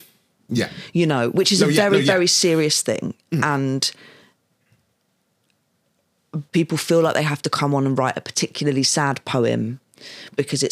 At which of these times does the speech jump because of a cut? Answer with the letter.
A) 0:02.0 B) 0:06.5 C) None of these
B